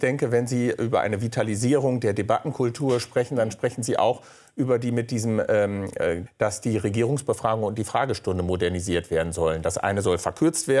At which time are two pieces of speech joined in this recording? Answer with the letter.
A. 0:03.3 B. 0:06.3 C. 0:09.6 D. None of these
B